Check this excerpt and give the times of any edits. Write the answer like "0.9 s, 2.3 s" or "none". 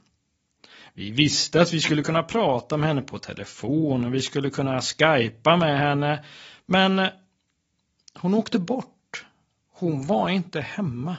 none